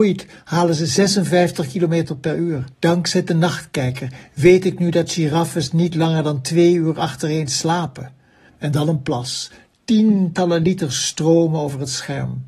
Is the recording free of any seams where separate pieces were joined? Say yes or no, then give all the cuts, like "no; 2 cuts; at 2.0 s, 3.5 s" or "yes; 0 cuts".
no; 2 cuts; at 2.7 s, 8.5 s